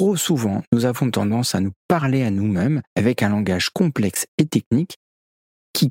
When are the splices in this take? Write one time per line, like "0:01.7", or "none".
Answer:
0:02.9